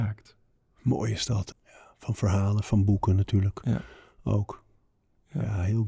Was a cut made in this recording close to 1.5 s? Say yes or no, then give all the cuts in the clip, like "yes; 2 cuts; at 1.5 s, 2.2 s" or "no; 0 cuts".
yes; 1 cut; at 1.5 s